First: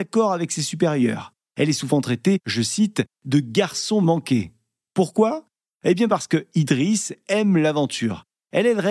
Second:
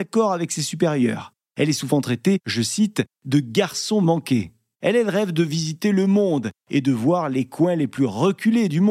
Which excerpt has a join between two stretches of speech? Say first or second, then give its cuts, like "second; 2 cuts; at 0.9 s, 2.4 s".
second; 1 cut; at 4.7 s